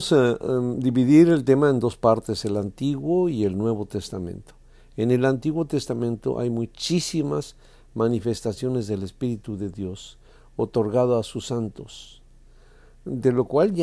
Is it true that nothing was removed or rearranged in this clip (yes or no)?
yes